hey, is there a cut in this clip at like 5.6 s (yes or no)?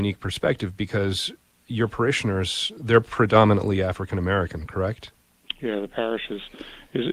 yes